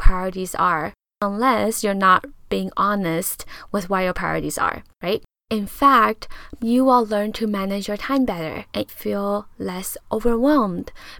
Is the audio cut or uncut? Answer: cut